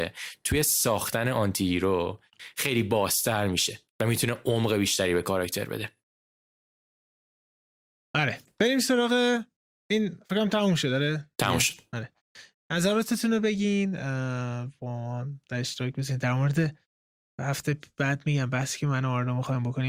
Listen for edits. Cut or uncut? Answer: uncut